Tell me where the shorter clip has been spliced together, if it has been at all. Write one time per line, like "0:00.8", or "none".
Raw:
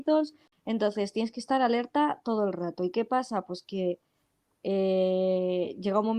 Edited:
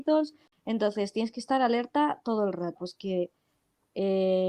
0:02.8